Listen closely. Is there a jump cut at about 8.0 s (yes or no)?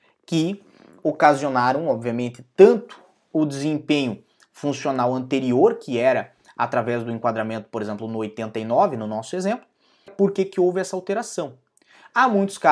no